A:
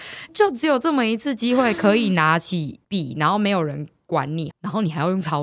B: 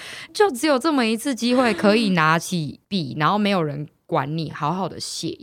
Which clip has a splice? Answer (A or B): A